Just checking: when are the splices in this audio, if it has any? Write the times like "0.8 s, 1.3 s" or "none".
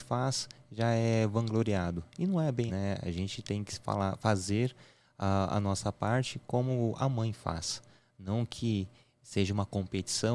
2.7 s